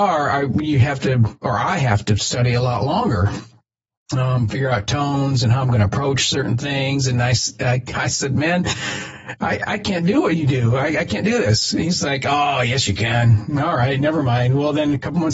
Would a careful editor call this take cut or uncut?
uncut